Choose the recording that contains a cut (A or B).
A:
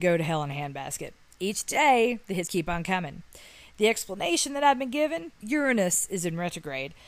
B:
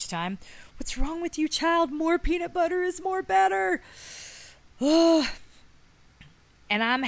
A